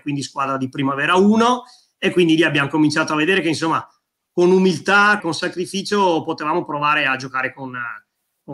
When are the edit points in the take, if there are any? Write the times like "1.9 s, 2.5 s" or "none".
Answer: 5.2 s